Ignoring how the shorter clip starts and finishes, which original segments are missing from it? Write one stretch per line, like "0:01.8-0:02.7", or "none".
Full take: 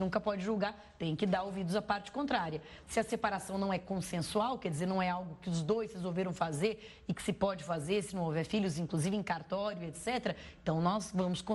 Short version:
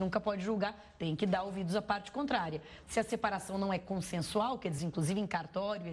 0:04.8-0:08.7

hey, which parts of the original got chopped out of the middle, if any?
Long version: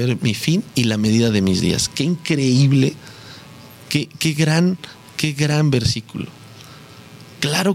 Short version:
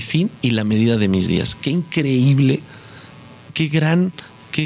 0:03.8-0:04.1

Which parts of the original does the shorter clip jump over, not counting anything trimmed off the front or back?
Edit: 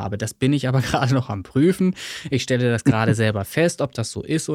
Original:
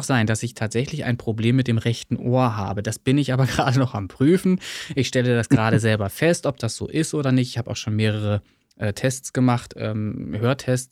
none

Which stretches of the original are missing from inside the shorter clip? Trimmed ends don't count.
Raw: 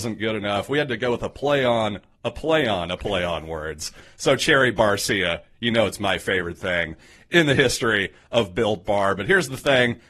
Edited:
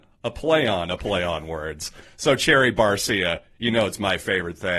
none

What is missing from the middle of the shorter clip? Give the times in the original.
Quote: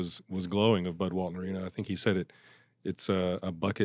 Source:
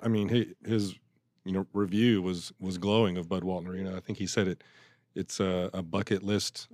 none

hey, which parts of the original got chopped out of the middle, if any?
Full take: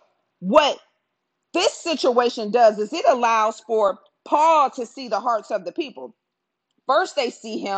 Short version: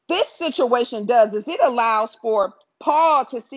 none

